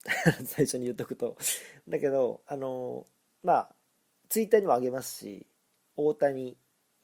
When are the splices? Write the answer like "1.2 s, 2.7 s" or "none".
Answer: none